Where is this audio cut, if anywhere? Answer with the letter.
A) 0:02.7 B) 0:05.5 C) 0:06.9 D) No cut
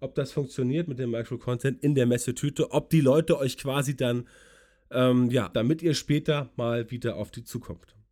B